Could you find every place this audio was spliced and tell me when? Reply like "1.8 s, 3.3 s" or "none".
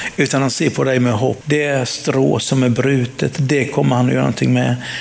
1.4 s